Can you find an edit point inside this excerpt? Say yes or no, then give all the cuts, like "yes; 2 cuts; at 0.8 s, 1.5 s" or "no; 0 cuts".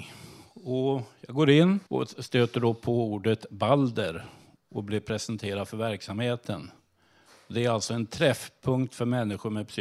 yes; 1 cut; at 1.9 s